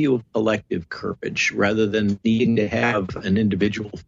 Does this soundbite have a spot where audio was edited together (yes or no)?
yes